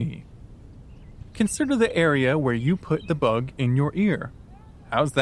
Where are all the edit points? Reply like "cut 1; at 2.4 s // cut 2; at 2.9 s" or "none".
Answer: none